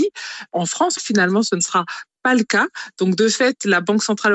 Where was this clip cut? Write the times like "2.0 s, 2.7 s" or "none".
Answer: 1.0 s

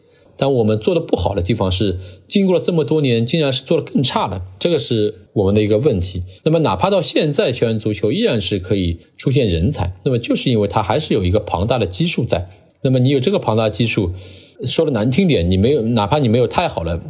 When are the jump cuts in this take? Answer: 6.4 s

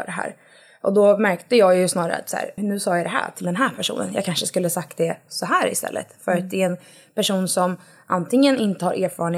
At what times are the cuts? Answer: 2.6 s

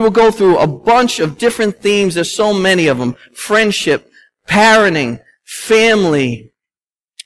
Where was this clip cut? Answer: none

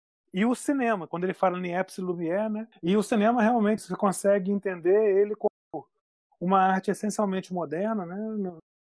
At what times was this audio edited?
2.7 s, 3.8 s

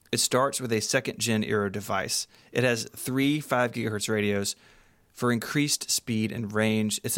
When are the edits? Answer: none

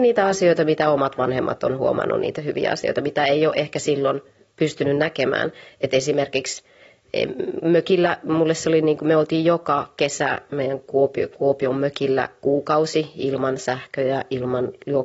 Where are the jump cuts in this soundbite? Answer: 7.0 s

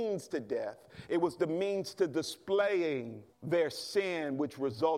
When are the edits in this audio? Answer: 3.3 s

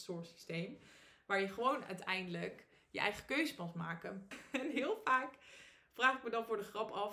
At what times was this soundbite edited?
4.3 s

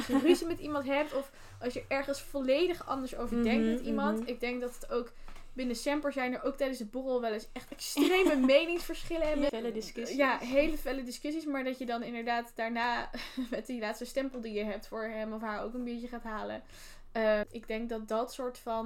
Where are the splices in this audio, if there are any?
9.5 s, 17.4 s

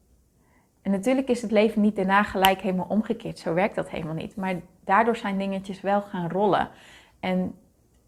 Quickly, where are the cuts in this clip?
none

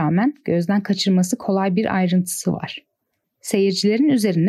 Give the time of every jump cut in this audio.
3.2 s

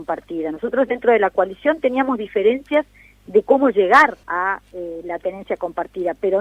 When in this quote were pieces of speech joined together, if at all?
4.2 s

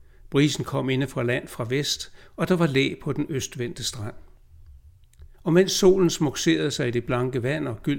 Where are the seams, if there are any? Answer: 5.3 s

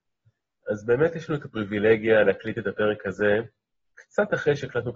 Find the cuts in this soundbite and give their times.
none

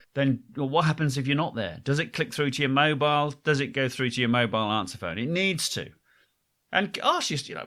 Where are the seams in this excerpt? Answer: none

